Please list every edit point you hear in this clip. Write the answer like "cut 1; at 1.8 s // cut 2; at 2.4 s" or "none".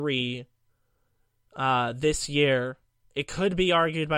none